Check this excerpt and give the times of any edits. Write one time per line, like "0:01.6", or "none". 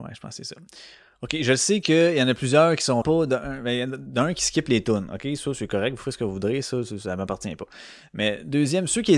0:03.0